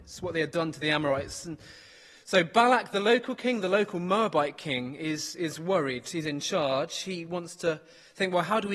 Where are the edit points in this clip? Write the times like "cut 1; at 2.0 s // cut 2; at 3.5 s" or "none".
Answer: none